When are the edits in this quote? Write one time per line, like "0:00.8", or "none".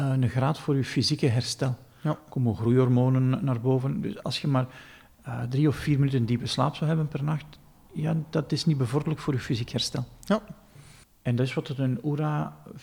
none